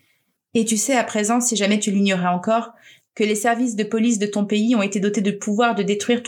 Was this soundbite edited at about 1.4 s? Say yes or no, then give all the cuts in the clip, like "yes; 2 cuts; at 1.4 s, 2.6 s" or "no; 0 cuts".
no; 0 cuts